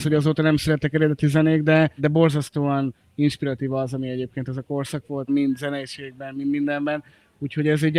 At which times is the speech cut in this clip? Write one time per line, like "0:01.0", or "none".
0:02.0
0:05.3